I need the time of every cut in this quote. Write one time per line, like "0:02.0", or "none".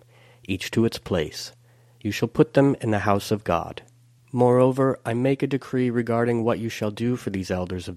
0:04.2